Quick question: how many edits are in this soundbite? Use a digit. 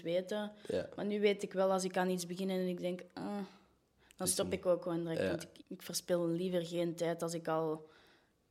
1